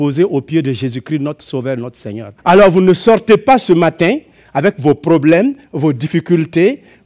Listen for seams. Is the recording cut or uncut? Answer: cut